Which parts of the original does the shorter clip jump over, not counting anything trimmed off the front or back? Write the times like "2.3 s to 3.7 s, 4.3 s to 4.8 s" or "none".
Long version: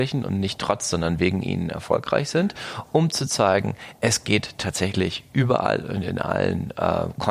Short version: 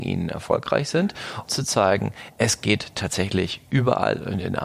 2.9 s to 3.1 s